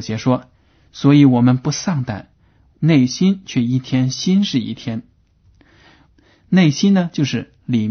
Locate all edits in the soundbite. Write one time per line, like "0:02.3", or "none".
0:02.7
0:06.1